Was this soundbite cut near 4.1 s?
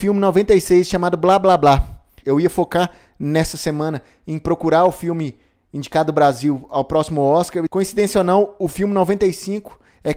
no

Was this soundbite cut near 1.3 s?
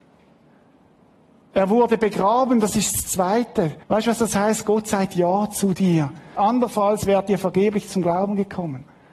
no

